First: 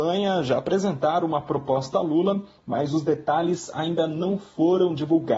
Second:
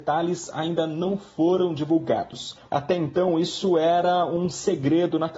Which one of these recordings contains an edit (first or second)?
second